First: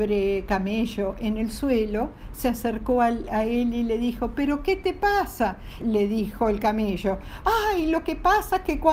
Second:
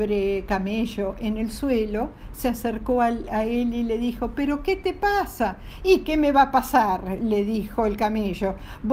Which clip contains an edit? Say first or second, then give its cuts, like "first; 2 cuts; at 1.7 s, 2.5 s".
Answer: first; 2 cuts; at 5.8 s, 7.4 s